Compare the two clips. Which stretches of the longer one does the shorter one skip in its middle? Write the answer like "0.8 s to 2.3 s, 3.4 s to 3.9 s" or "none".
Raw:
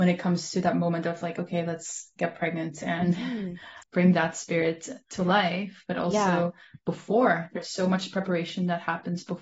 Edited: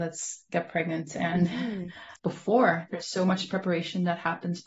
3.9 s to 6.8 s